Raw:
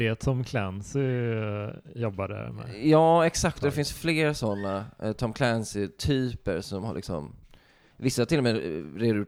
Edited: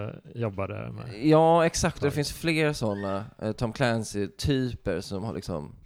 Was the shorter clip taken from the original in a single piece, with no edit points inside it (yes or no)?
yes